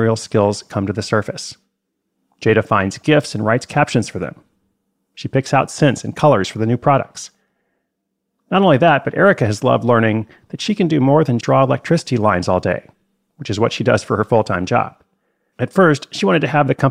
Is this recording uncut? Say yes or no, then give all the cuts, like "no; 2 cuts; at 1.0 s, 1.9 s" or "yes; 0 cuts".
no; 2 cuts; at 11.4 s, 15.5 s